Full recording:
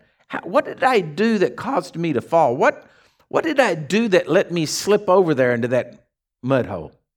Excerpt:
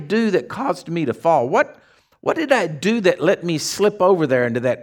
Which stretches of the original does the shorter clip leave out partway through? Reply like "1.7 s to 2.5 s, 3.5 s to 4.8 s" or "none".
none